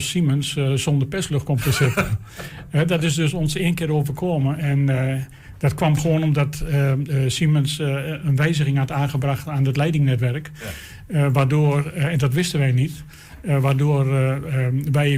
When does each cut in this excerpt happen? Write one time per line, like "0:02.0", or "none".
none